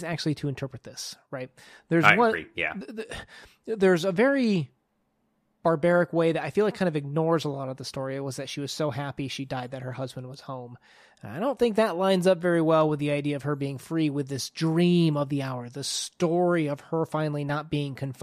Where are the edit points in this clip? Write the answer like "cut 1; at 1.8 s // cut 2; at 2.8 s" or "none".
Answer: none